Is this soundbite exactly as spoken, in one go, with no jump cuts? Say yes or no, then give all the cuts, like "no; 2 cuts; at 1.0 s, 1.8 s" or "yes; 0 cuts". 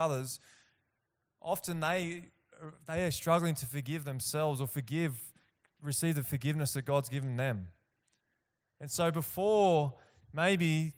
yes; 0 cuts